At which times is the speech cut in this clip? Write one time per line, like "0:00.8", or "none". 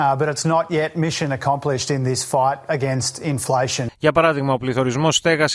0:03.9

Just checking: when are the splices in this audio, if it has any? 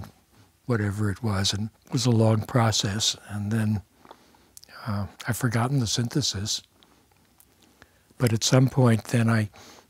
0:01.8
0:05.2

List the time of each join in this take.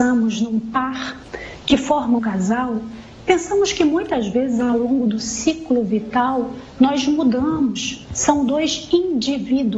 0:02.2
0:08.1

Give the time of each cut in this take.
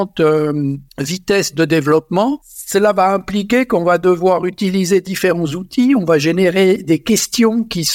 none

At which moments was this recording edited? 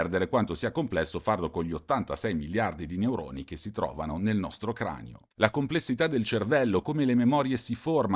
0:05.3
0:06.8

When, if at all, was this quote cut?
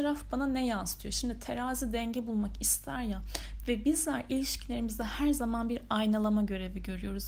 none

